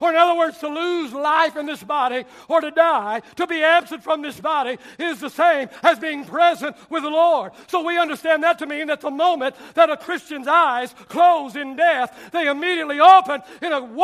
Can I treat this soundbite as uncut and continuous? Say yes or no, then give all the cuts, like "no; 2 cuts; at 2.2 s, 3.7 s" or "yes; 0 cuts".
yes; 0 cuts